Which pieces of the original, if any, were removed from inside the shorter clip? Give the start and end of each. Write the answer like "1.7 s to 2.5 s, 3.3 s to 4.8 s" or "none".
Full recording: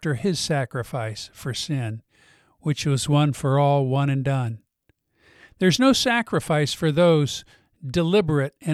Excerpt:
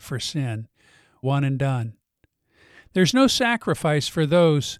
2.6 s to 3.9 s